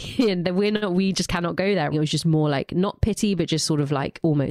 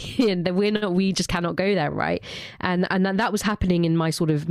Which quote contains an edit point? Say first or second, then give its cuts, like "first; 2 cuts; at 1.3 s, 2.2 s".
first; 1 cut; at 1.9 s